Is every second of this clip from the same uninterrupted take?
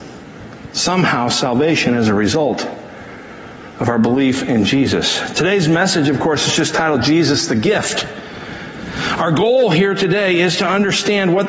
yes; 0 cuts

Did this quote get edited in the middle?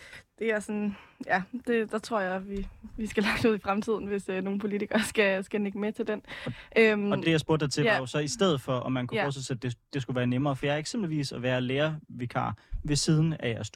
no; 0 cuts

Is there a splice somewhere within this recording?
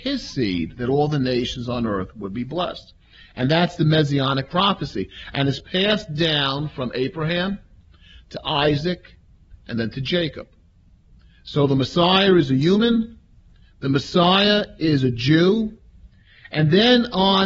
no; 0 cuts

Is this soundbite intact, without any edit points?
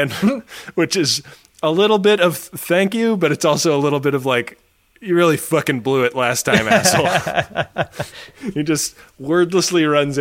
yes; 0 cuts

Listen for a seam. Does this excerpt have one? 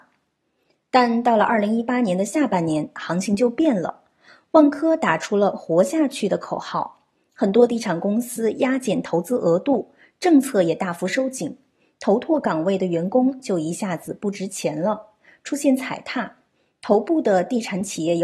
no; 0 cuts

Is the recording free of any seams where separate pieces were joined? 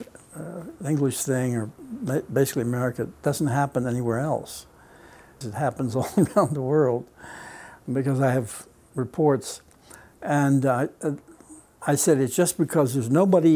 no; 1 cut; at 5.4 s

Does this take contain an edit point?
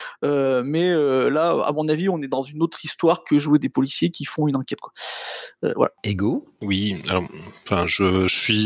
no; 0 cuts

